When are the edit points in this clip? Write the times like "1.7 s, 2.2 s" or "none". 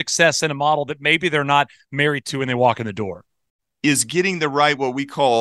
3.6 s